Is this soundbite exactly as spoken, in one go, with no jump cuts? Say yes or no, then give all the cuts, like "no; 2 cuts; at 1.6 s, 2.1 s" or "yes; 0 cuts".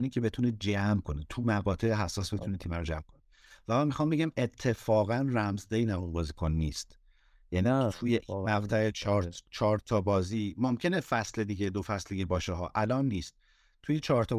yes; 0 cuts